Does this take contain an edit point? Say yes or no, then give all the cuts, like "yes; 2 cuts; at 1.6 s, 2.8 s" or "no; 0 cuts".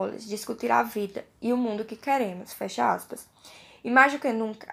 no; 0 cuts